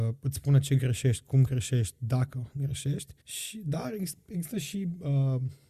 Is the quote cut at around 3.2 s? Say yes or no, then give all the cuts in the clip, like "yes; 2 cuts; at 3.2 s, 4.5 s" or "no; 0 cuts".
yes; 1 cut; at 3.2 s